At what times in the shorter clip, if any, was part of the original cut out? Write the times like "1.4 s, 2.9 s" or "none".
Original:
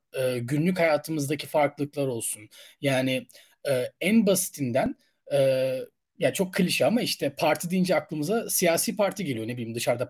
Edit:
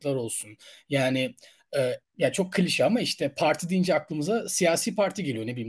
2.0 s